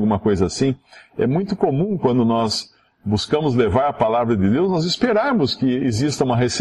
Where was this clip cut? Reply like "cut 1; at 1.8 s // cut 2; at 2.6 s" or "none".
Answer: none